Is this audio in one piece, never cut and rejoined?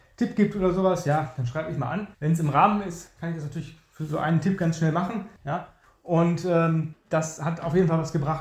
no; 3 cuts; at 2.1 s, 5.4 s, 6.9 s

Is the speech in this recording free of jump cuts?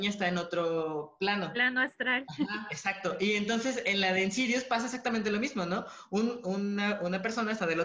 yes; 0 cuts

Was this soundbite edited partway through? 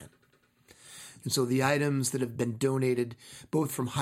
yes; 1 cut; at 1.2 s

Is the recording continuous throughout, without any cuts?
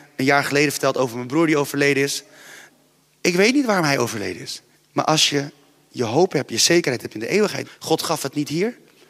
no; 2 cuts; at 4.7 s, 7.6 s

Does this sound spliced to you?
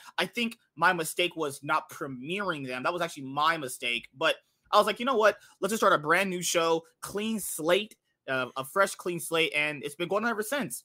no; 0 cuts

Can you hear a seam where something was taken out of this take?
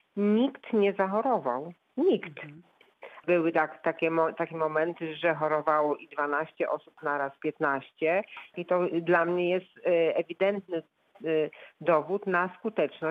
yes; 2 cuts; at 3.2 s, 8.5 s

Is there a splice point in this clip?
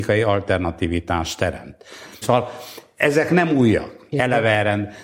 yes; 2 cuts; at 2.2 s, 4.1 s

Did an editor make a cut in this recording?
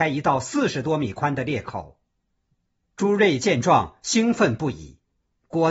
no; 0 cuts

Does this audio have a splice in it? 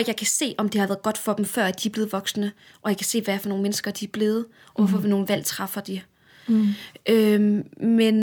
no; 0 cuts

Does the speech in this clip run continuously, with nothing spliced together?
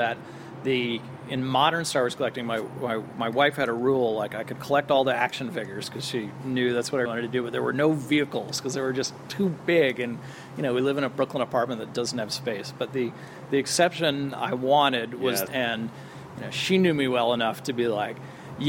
no; 2 cuts; at 7.0 s, 15.5 s

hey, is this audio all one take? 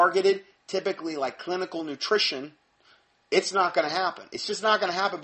yes; 0 cuts

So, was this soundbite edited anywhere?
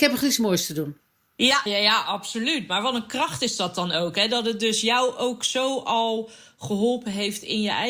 yes; 1 cut; at 1.7 s

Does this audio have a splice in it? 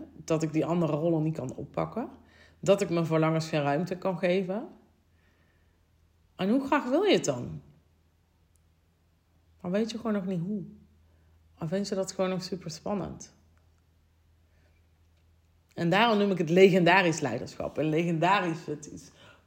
yes; 1 cut; at 9.4 s

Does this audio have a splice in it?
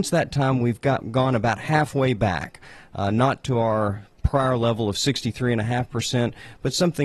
yes; 1 cut; at 1.0 s

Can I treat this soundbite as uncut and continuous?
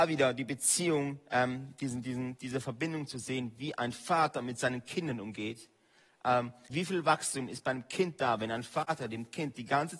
no; 1 cut; at 6.7 s

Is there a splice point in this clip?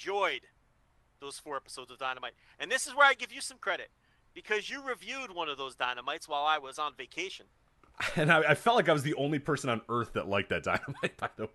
no; 0 cuts

